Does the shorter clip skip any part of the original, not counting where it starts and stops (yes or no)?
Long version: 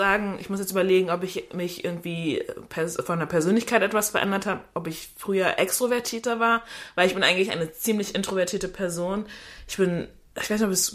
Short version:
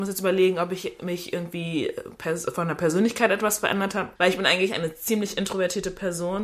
yes